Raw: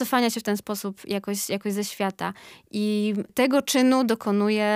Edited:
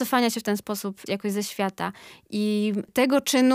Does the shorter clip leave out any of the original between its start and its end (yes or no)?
yes